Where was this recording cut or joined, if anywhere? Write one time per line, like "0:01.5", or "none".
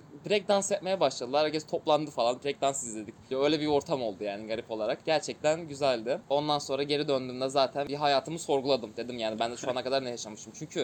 0:03.3

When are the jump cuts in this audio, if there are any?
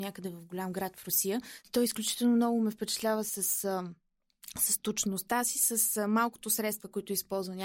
0:01.6

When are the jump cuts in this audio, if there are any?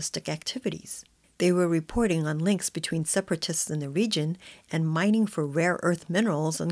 0:01.2

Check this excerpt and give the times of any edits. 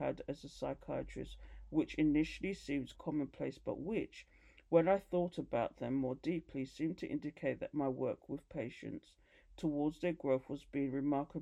0:02.9

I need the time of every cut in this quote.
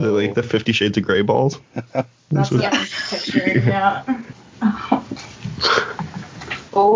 0:04.3

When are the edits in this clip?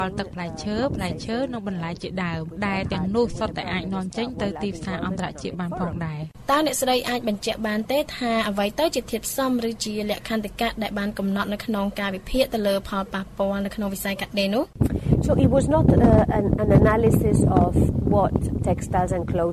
0:17.9

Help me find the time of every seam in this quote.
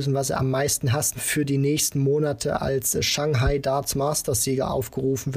0:01.2

